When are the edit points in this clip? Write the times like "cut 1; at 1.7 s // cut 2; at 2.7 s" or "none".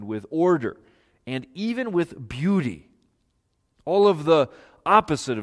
none